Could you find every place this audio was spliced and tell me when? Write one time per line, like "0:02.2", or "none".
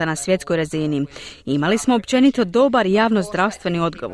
none

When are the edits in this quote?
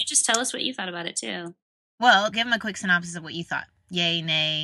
0:02.3

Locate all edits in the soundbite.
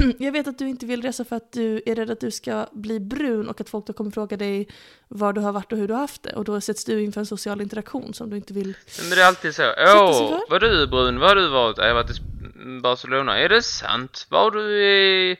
none

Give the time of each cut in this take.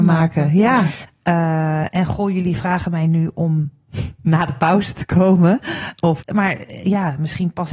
0:01.1
0:06.2

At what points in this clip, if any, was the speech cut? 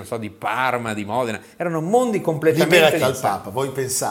0:03.0

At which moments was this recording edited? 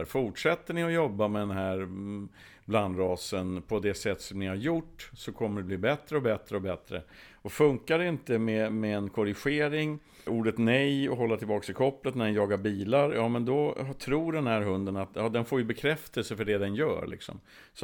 0:10.3

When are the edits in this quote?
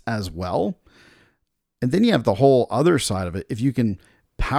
none

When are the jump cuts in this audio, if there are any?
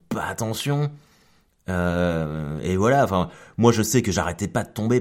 none

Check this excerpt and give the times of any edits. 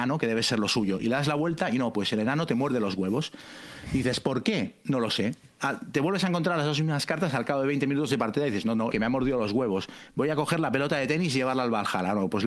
0:08.9

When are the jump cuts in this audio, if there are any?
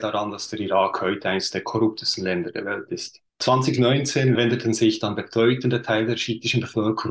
0:03.3

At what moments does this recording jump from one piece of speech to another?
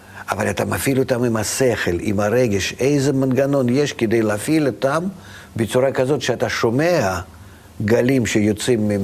none

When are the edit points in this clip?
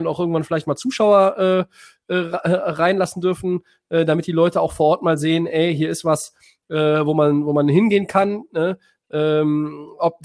none

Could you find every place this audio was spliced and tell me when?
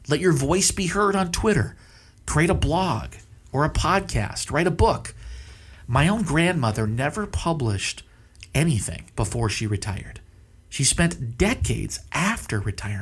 0:09.1

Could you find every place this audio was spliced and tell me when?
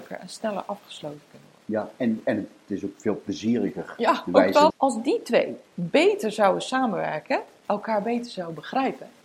0:04.7

